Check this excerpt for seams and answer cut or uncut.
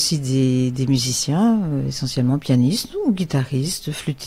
uncut